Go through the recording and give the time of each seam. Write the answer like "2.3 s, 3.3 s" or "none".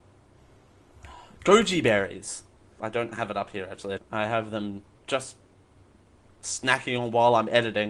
2.8 s, 4.0 s